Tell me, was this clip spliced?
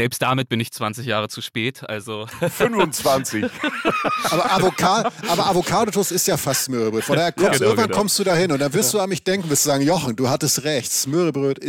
no; 0 cuts

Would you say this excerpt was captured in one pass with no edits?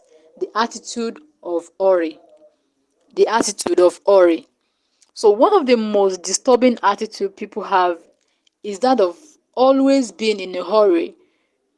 yes; 0 cuts

